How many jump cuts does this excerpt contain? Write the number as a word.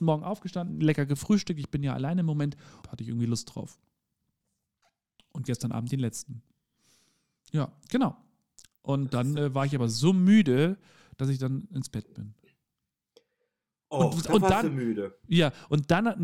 one